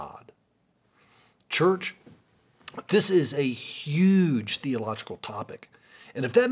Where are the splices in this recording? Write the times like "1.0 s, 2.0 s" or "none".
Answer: none